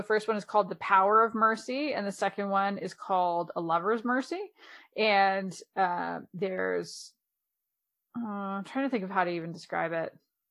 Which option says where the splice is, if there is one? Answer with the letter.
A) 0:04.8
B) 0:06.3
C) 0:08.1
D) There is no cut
D